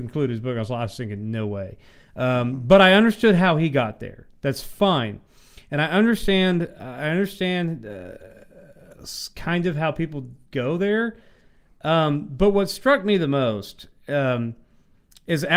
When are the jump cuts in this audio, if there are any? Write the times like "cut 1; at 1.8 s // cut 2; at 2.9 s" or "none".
none

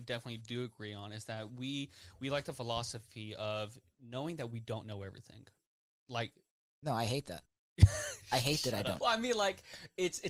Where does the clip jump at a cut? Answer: cut 1; at 9.0 s

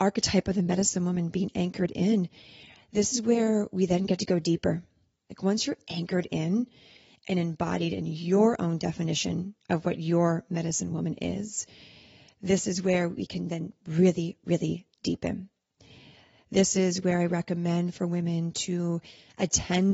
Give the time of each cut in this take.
cut 1; at 5.3 s

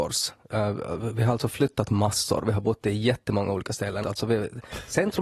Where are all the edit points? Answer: cut 1; at 4.0 s

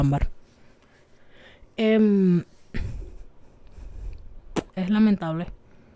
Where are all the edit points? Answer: cut 1; at 4.7 s

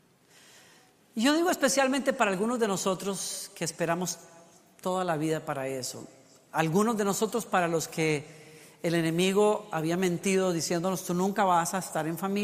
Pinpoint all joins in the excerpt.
none

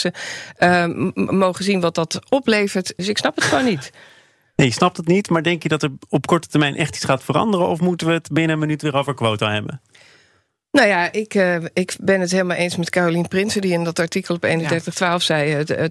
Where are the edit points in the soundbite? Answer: cut 1; at 3.0 s

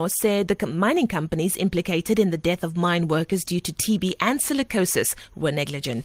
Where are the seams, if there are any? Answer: none

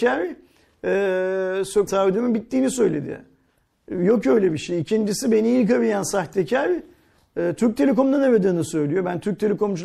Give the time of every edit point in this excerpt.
cut 1; at 1.9 s

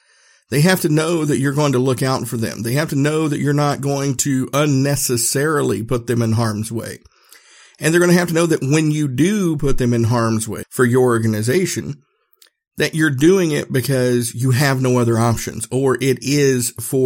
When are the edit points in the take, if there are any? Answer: cut 1; at 10.6 s

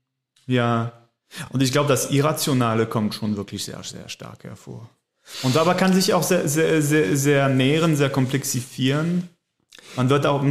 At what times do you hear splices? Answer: none

